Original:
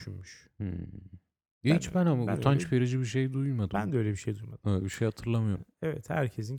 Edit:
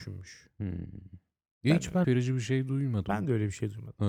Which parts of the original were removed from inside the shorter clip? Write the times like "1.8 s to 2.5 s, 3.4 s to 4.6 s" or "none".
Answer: 2.0 s to 2.7 s